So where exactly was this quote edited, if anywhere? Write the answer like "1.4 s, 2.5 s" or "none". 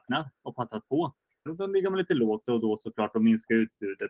1.5 s